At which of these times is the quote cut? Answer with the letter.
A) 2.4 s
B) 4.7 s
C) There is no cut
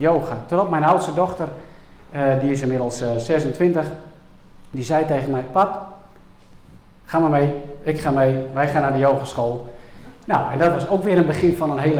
C